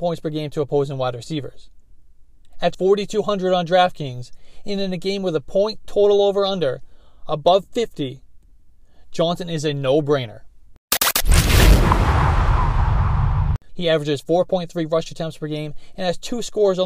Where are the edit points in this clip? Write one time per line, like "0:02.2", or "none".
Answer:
0:02.7
0:13.7